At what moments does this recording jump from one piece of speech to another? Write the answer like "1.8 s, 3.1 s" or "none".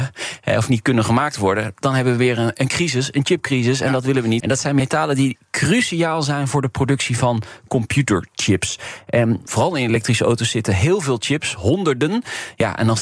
4.4 s

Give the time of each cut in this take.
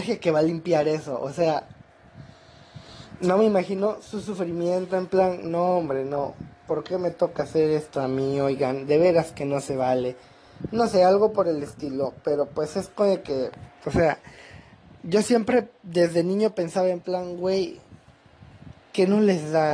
13.8 s

